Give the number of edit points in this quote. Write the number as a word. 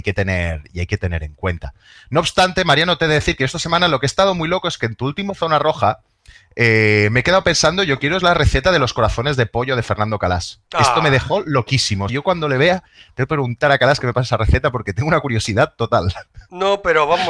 two